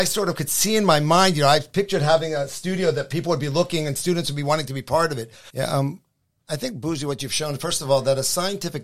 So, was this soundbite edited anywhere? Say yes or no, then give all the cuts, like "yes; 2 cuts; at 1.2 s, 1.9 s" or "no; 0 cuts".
yes; 1 cut; at 5.5 s